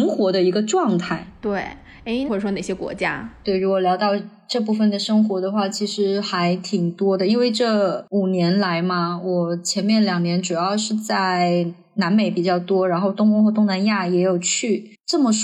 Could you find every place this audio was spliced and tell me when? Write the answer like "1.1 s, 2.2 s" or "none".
2.3 s